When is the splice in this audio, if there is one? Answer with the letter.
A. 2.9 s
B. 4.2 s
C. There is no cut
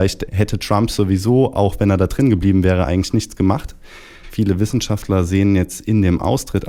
B